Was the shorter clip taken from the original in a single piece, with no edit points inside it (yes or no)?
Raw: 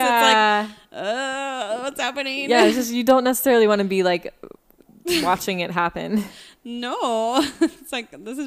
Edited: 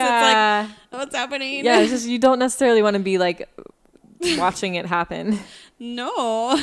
no